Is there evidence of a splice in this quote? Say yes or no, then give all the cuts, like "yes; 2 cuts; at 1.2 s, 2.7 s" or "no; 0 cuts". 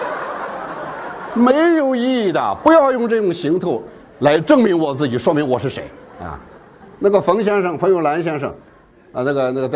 no; 0 cuts